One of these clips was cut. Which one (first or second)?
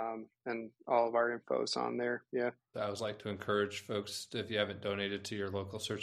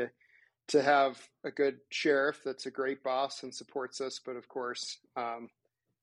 first